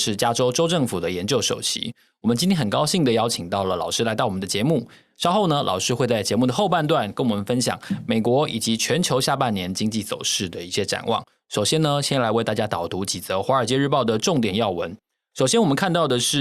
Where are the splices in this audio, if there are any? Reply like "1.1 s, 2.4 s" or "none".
none